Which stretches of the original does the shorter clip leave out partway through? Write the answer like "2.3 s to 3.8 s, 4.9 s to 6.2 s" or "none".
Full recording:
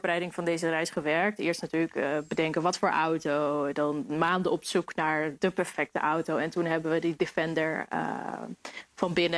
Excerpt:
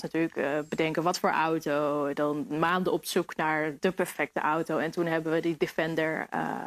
none